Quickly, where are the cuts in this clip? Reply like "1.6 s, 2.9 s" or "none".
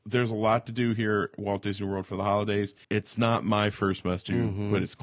2.8 s